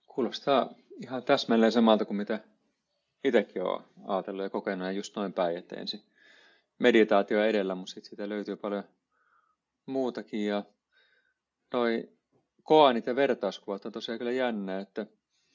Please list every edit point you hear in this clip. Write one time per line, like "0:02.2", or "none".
none